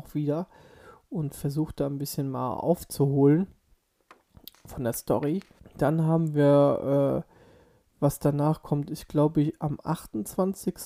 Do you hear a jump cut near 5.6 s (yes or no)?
yes